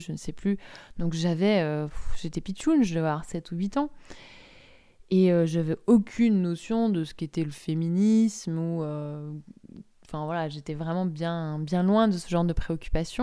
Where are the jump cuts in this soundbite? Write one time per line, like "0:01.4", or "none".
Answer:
none